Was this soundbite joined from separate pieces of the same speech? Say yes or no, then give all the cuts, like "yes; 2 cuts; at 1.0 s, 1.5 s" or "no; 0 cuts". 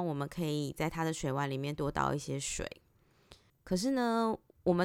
yes; 1 cut; at 3.5 s